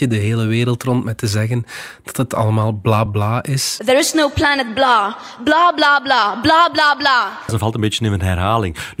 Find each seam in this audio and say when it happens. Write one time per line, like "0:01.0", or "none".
0:03.1
0:07.5